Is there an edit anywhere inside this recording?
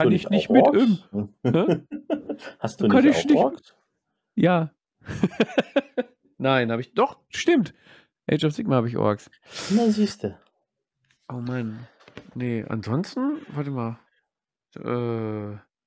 no; 0 cuts

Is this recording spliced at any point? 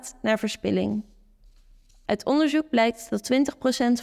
no; 0 cuts

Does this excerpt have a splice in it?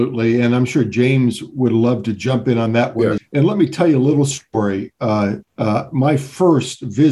yes; 2 cuts; at 3.2 s, 5.4 s

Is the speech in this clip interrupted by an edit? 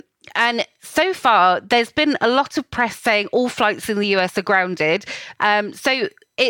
yes; 1 cut; at 5.4 s

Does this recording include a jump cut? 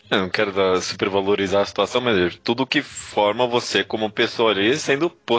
no; 0 cuts

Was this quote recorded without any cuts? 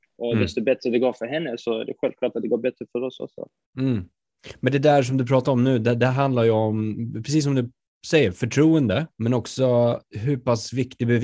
no; 1 cut; at 9.1 s

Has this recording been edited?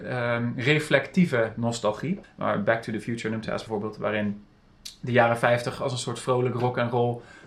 yes; 2 cuts; at 2.2 s, 3.7 s

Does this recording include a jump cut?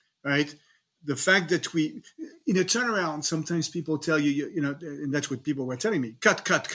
no; 0 cuts

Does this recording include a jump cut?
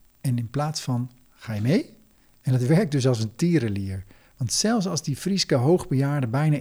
no; 0 cuts

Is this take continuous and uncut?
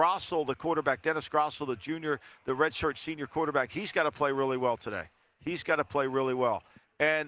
yes; 0 cuts

